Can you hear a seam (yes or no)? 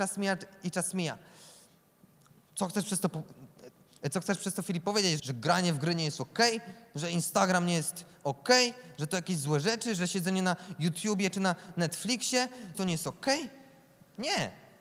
yes